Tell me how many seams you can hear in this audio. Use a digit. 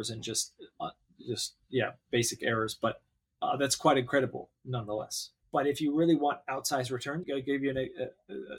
2